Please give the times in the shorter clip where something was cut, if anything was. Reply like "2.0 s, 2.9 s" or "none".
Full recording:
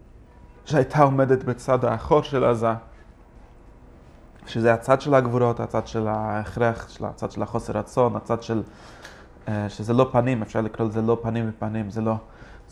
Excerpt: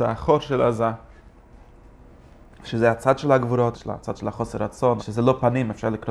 3.7 s, 5.0 s